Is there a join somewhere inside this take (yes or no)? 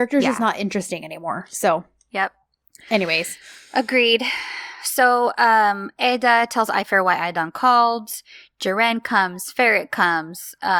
no